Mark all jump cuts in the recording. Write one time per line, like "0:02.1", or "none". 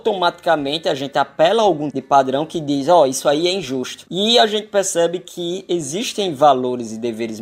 0:01.9
0:04.1